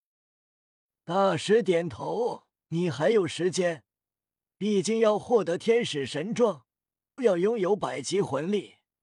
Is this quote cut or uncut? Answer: cut